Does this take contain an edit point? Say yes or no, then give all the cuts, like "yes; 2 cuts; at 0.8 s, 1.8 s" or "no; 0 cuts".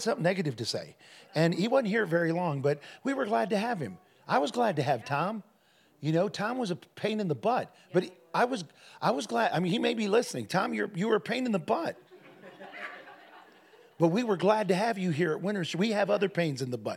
no; 0 cuts